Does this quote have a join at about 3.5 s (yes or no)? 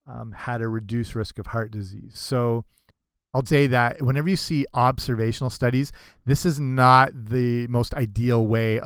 yes